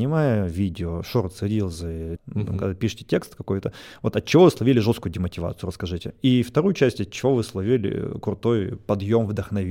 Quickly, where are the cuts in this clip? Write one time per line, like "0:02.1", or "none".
0:02.2